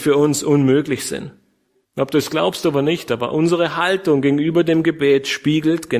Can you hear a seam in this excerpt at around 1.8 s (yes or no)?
yes